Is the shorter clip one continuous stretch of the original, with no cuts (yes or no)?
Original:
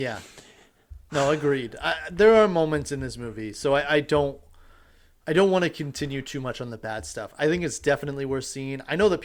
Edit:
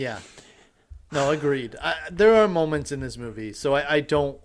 yes